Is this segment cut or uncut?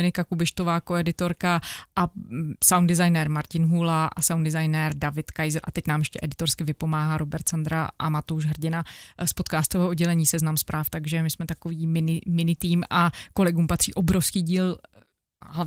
uncut